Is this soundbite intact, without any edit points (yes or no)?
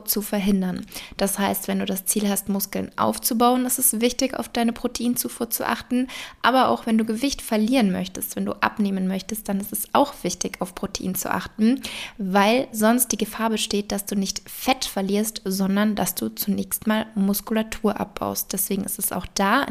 yes